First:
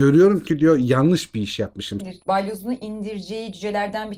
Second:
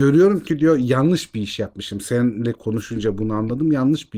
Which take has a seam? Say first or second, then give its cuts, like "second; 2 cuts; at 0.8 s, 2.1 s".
first; 1 cut; at 2.0 s